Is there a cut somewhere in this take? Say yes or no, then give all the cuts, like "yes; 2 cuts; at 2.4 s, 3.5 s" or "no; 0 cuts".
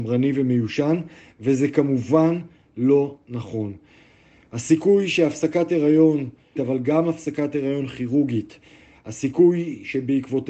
yes; 1 cut; at 6.6 s